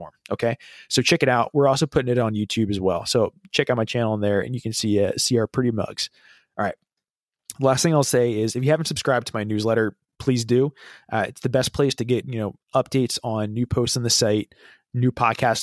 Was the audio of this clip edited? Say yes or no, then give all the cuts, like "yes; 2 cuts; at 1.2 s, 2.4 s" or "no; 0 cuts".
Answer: no; 0 cuts